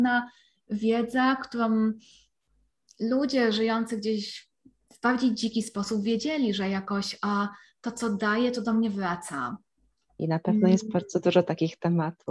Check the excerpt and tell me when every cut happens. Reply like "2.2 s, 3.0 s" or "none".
10.2 s